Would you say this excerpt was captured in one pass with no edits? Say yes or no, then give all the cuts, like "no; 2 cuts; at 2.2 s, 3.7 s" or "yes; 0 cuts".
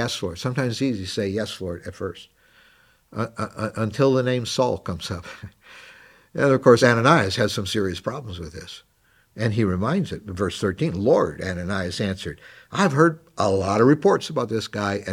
yes; 0 cuts